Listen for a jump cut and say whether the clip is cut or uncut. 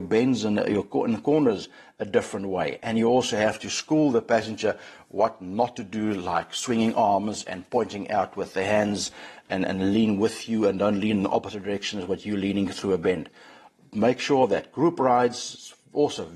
uncut